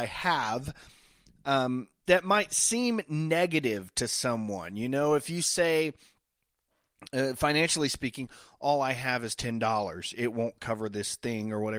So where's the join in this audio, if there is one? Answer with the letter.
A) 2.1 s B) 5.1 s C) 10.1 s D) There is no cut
A